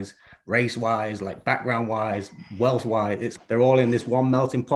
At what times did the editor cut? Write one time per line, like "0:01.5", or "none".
0:03.4